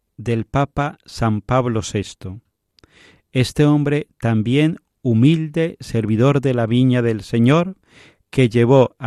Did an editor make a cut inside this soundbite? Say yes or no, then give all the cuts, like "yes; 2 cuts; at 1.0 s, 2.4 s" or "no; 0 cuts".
no; 0 cuts